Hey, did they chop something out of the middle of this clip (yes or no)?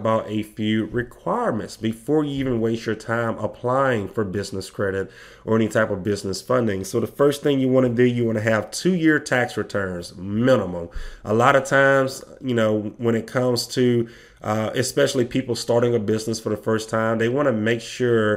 no